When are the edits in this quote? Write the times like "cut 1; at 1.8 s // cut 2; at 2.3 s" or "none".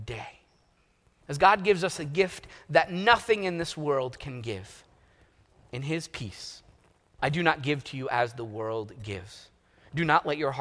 cut 1; at 7.2 s